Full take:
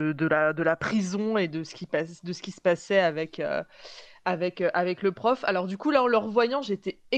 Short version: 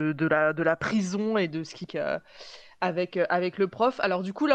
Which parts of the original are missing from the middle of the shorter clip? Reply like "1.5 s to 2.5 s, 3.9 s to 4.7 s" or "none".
1.9 s to 3.3 s